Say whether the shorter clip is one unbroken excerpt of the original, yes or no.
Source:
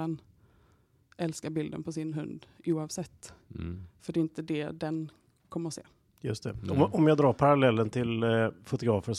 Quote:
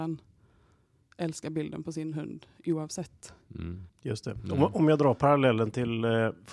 no